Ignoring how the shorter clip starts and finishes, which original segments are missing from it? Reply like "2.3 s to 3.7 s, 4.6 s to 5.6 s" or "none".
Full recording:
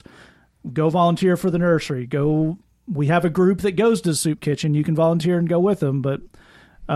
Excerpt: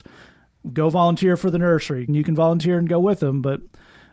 2.1 s to 4.7 s